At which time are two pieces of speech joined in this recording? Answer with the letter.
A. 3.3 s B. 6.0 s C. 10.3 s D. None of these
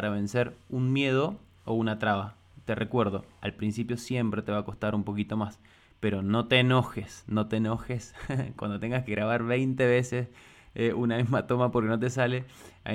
D